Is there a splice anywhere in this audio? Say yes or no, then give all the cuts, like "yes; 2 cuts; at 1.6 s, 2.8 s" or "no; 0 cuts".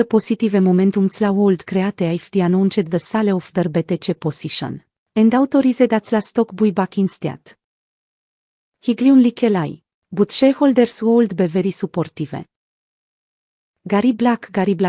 no; 0 cuts